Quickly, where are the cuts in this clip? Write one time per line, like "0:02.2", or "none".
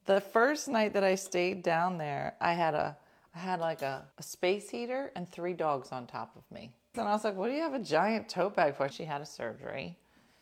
0:04.1
0:06.9
0:08.9